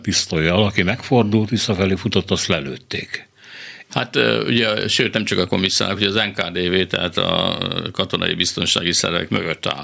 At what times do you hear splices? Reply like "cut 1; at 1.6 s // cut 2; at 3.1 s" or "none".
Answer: cut 1; at 3.9 s

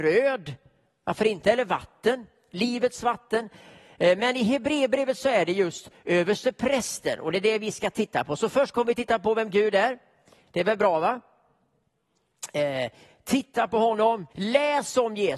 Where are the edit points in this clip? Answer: cut 1; at 14.3 s

